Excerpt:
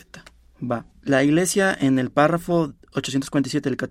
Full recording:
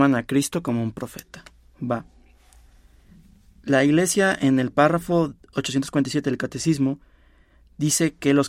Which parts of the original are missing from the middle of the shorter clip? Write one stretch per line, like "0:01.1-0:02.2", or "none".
0:02.1-0:03.5

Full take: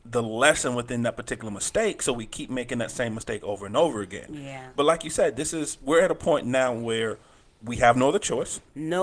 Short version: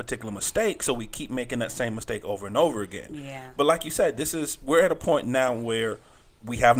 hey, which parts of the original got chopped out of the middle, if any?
none

